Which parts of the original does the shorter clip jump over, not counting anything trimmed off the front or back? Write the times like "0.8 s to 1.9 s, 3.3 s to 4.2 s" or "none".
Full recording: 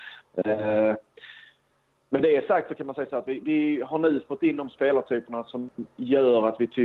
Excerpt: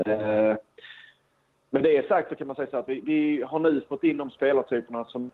none